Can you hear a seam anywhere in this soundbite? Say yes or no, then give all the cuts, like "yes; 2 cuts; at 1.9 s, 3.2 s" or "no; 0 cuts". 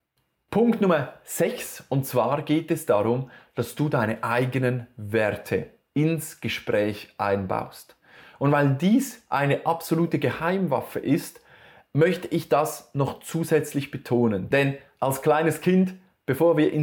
yes; 1 cut; at 14.5 s